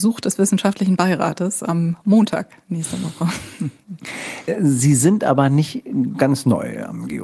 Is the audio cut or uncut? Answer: uncut